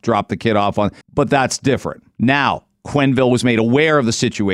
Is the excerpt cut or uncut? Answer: cut